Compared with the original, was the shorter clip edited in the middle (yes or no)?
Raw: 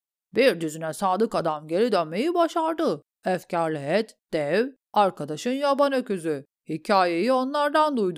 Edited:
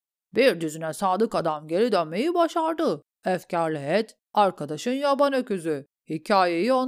yes